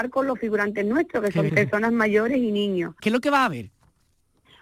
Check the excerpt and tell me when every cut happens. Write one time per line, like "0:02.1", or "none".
0:01.5
0:03.0